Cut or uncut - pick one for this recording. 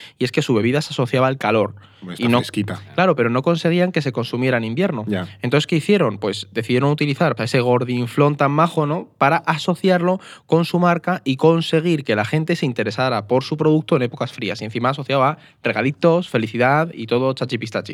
cut